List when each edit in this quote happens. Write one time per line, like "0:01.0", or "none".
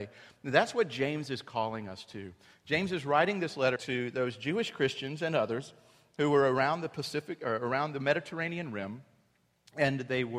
0:03.8

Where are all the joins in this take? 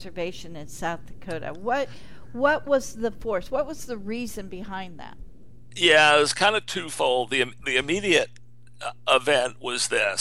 none

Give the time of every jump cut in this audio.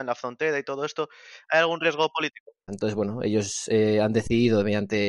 0:02.7

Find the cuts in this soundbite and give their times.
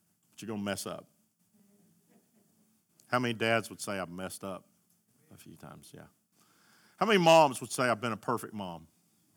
none

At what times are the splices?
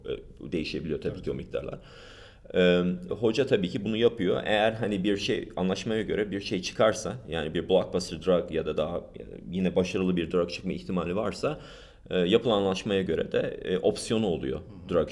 0:03.1

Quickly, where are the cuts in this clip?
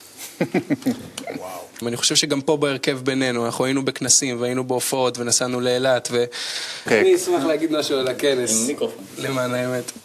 0:01.8
0:06.9

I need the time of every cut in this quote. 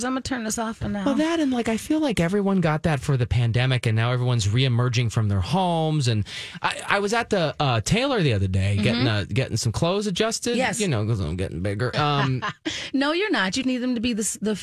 0:11.9
0:13.6

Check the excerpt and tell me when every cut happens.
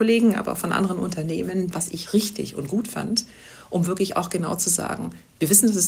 0:01.7

